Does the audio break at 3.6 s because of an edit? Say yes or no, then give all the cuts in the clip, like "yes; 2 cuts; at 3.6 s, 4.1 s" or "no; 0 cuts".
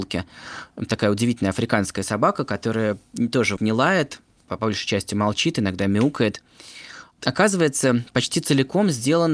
yes; 1 cut; at 3.6 s